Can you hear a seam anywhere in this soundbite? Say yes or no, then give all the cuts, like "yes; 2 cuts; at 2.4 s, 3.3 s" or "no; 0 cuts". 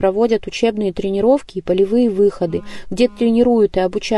no; 0 cuts